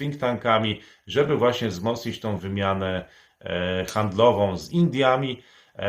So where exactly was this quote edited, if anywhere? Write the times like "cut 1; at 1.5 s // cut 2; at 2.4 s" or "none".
cut 1; at 2.4 s